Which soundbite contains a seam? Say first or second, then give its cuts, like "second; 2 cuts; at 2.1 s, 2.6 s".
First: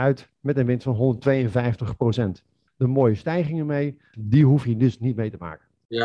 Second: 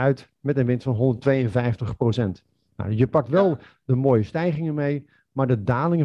first; 2 cuts; at 2.7 s, 4.1 s